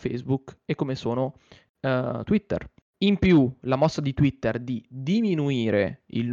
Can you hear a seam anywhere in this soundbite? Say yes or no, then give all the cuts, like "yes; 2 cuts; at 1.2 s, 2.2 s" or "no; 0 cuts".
no; 0 cuts